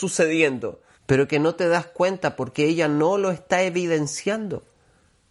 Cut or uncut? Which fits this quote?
cut